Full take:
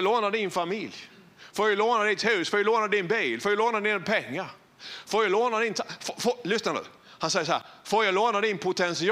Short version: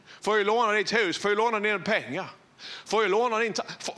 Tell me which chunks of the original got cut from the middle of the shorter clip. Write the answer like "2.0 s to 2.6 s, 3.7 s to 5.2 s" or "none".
2.5 s to 3.4 s

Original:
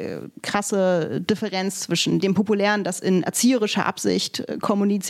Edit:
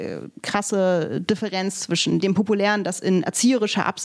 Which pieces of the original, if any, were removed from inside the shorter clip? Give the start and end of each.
none

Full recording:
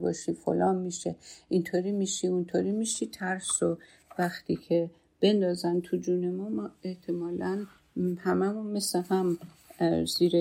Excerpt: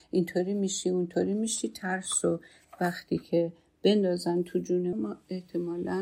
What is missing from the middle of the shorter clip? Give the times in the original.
6.3 s to 6.5 s

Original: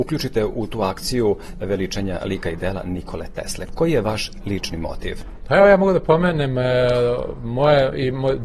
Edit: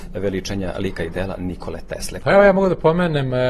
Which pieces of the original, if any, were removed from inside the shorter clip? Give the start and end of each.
3.7 s to 5.4 s

